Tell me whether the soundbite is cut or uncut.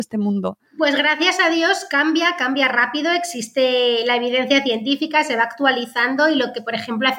uncut